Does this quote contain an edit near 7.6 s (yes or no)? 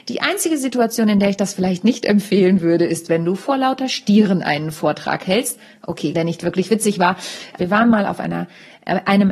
yes